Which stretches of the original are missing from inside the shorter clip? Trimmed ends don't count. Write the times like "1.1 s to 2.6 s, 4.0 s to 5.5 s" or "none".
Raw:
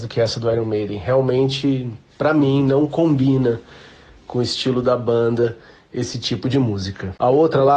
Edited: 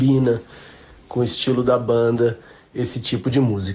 none